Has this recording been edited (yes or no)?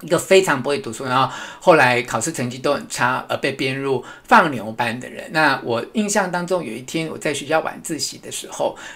no